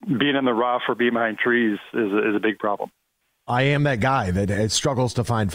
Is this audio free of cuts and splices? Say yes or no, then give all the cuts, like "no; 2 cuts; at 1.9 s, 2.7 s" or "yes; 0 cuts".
yes; 0 cuts